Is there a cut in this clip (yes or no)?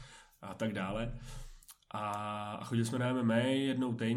no